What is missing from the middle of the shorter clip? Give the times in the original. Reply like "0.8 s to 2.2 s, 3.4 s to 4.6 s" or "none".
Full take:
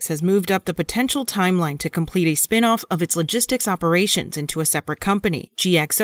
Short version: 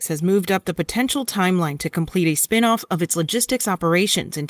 none